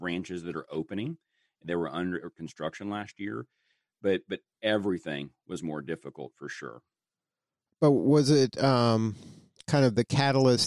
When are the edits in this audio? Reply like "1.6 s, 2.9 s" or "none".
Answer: none